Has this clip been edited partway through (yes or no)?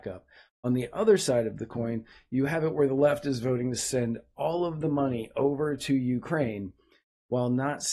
no